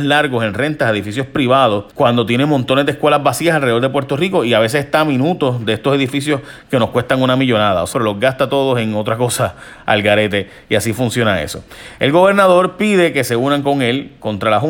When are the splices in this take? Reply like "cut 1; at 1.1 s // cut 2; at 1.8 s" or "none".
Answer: cut 1; at 1.9 s // cut 2; at 7.9 s